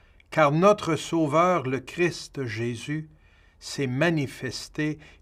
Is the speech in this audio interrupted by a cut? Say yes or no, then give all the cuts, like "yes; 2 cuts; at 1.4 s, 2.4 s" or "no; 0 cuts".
no; 0 cuts